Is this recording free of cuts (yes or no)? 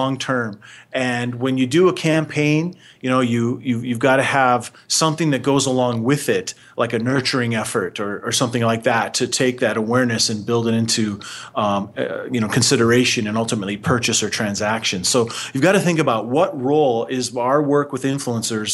yes